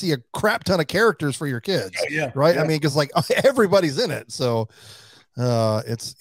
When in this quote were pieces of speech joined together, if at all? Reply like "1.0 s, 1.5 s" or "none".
none